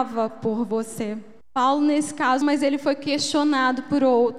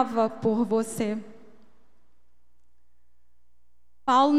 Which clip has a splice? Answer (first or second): first